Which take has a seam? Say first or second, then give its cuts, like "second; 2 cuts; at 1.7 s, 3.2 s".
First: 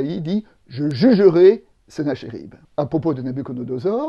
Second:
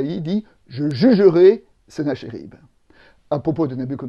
first; 1 cut; at 2.6 s